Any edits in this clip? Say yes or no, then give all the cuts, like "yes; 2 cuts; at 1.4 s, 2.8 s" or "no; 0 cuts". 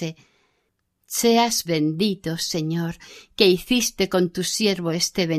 yes; 1 cut; at 1.6 s